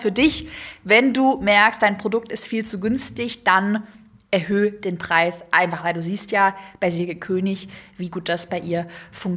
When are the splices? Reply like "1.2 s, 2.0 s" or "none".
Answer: none